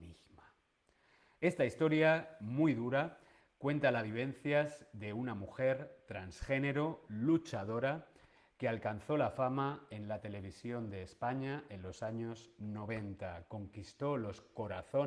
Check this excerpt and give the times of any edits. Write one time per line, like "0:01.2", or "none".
none

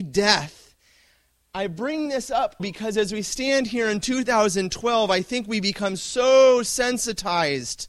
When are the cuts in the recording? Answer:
0:02.6

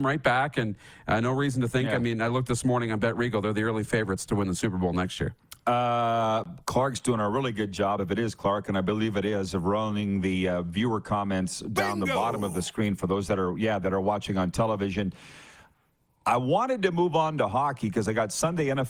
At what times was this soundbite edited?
none

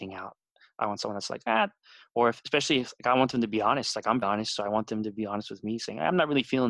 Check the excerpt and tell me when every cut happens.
0:04.2

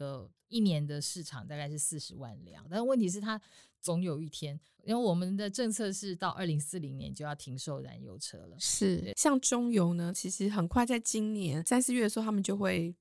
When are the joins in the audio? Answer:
0:02.6
0:09.1
0:10.1

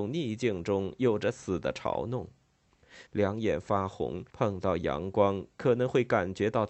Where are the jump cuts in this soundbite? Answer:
0:03.1
0:04.3

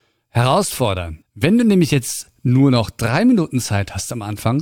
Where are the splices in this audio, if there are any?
0:01.2

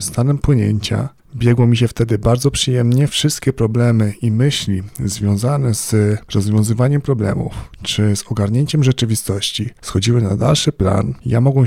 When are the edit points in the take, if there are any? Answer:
0:01.2

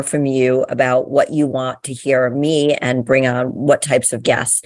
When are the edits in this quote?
none

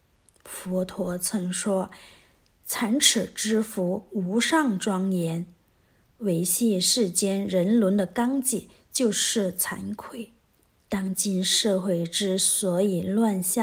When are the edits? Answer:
none

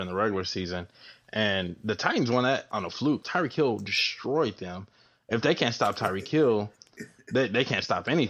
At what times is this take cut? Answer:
0:03.2

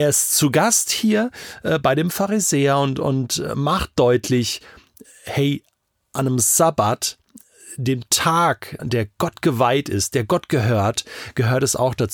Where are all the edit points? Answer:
0:08.8

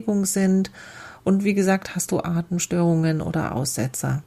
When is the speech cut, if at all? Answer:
none

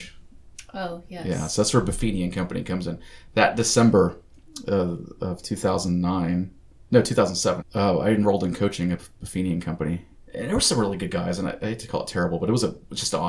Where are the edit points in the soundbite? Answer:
0:07.6
0:10.2

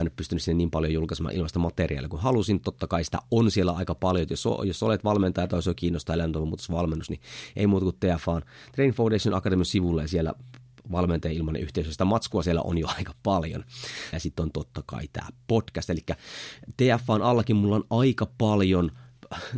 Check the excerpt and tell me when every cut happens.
0:14.1

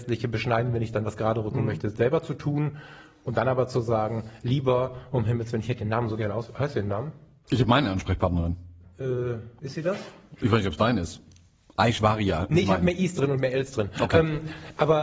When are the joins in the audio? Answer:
none

